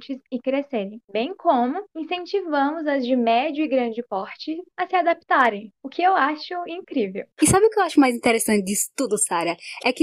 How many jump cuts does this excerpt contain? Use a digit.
1